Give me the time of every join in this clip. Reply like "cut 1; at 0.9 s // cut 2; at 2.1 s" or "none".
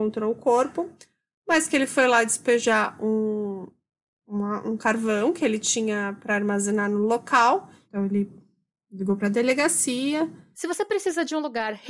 cut 1; at 7.8 s // cut 2; at 10.5 s

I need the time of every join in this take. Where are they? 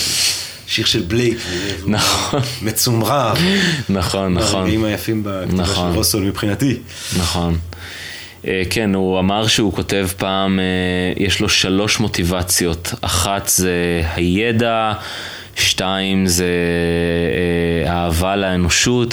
none

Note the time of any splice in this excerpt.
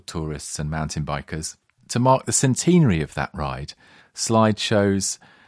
cut 1; at 1.8 s // cut 2; at 4.0 s

